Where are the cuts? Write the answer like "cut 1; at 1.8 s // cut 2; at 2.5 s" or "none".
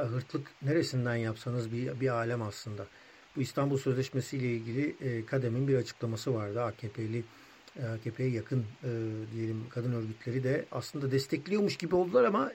none